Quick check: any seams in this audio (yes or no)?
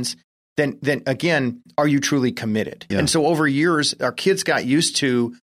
yes